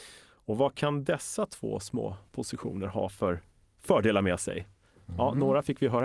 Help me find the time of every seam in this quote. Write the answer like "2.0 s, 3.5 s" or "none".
none